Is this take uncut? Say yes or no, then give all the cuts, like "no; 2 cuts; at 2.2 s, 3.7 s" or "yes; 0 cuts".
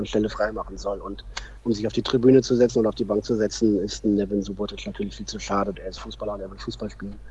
no; 1 cut; at 5.7 s